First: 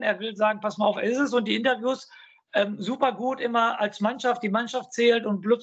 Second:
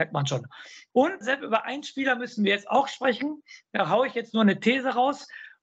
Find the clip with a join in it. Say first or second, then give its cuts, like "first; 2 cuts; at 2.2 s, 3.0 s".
second; 1 cut; at 1.2 s